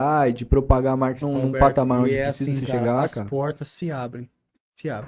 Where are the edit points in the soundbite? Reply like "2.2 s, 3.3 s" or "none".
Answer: 1.2 s